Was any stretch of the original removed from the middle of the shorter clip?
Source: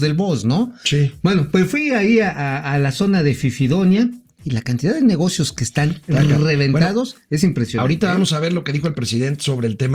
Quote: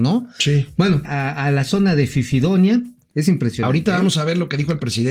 yes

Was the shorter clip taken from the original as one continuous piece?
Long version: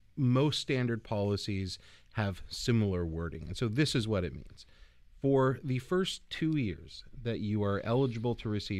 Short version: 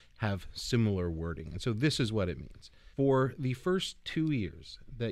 no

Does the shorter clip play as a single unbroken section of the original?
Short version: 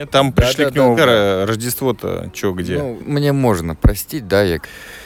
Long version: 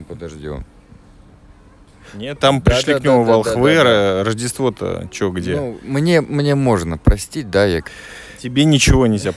no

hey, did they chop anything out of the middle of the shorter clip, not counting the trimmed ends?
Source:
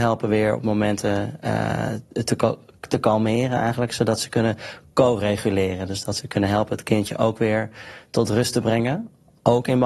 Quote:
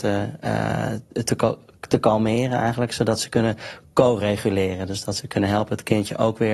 no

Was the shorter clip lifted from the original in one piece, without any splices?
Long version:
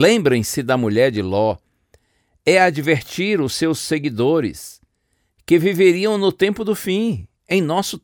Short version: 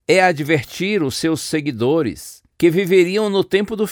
no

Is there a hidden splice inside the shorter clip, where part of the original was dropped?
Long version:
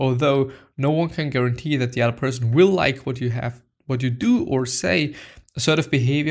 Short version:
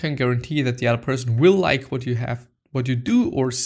no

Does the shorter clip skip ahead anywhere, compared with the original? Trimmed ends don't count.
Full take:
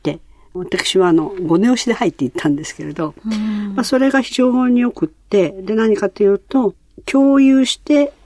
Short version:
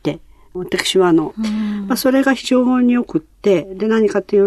yes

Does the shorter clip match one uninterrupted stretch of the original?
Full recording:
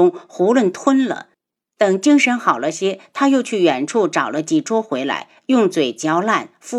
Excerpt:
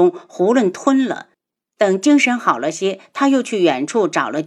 yes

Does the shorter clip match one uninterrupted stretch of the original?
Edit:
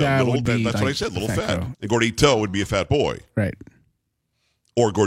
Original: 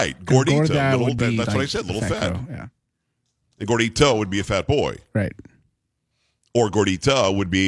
no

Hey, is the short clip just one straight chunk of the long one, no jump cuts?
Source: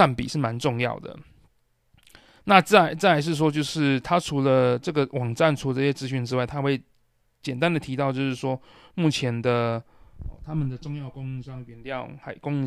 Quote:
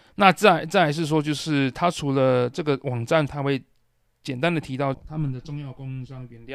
no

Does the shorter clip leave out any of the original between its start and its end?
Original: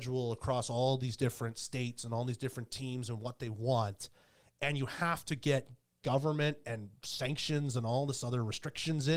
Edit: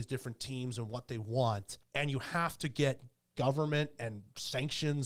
yes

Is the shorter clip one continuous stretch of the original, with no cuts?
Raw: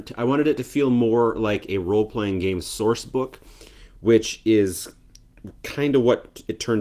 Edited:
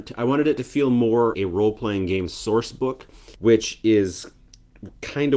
no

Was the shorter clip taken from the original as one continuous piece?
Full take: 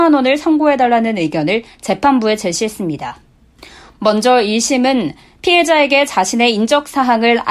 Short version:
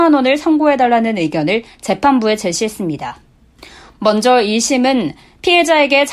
yes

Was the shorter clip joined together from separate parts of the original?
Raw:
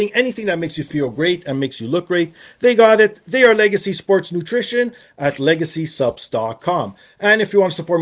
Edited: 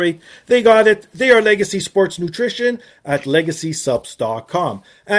no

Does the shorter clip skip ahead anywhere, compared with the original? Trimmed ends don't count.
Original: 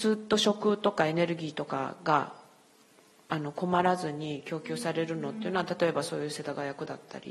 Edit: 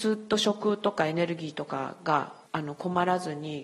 yes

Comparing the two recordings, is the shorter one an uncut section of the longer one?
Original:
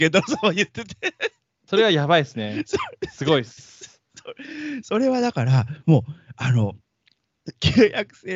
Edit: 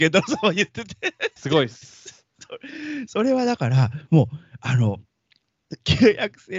no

